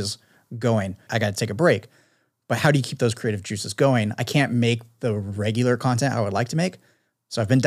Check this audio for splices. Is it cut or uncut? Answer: cut